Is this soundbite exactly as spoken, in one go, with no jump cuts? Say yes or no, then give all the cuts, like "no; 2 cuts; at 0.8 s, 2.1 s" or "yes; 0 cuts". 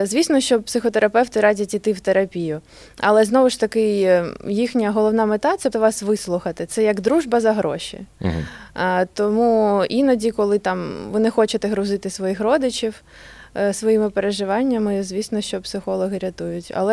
no; 1 cut; at 5.7 s